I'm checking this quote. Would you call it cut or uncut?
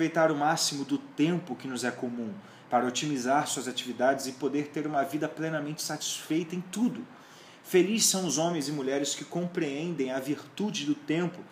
uncut